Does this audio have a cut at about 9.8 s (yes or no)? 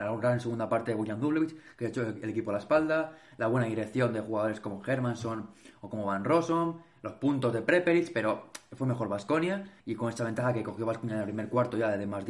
yes